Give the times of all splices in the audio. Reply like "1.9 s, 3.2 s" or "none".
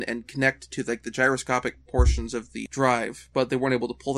2.7 s